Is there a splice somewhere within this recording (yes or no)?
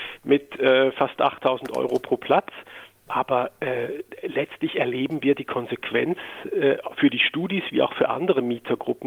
no